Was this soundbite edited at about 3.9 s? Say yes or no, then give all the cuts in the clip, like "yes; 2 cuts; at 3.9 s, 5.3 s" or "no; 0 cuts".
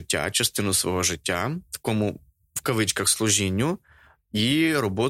no; 0 cuts